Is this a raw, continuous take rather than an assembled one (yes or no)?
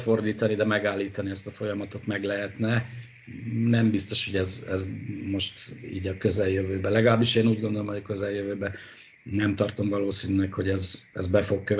yes